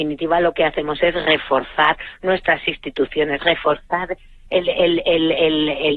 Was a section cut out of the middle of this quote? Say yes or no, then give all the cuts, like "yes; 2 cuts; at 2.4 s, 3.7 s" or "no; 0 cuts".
no; 0 cuts